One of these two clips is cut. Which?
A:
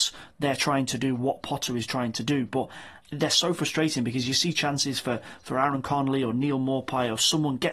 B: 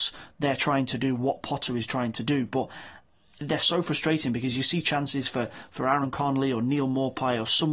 A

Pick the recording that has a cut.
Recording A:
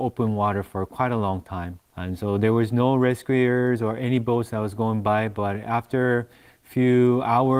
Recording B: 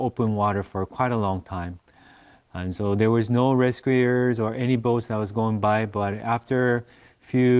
A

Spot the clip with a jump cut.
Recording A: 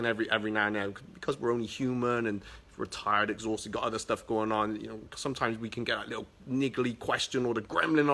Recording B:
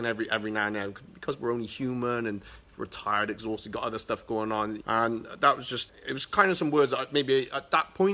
B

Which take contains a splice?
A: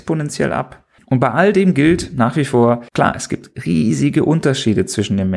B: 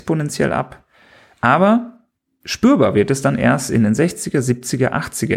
A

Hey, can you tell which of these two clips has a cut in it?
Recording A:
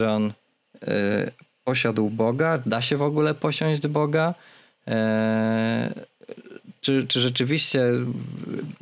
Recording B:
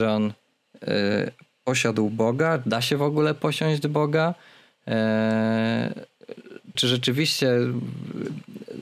B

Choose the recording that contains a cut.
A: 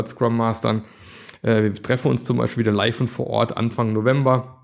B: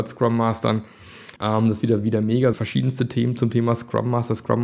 B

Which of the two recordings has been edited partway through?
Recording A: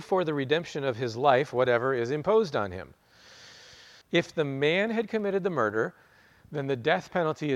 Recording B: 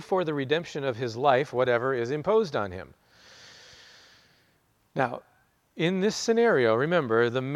A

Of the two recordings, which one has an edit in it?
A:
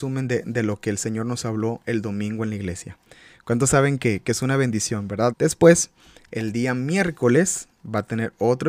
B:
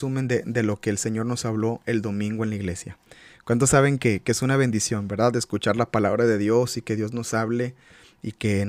A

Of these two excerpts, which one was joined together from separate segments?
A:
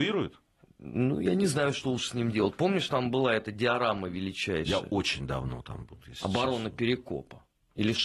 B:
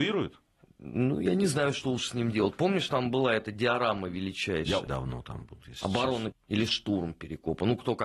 B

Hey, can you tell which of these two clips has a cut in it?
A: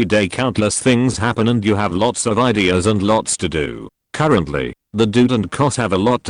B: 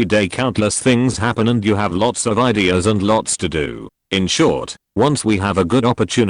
A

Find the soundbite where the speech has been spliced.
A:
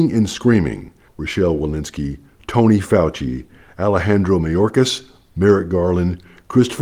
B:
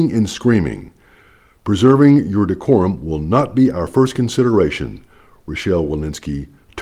A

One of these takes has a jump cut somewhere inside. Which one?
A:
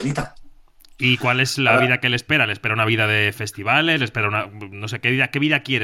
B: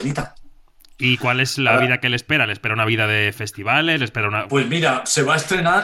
B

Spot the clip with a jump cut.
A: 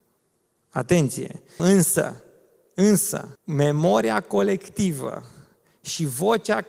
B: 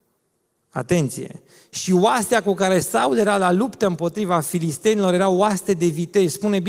A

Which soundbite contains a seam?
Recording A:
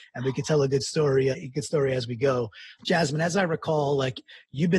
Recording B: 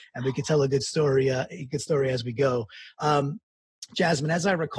A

